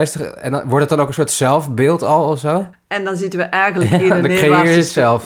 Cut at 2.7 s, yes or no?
yes